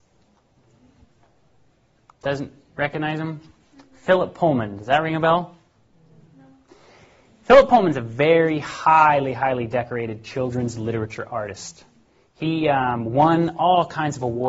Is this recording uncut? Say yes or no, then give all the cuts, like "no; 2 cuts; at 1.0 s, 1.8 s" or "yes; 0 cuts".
yes; 0 cuts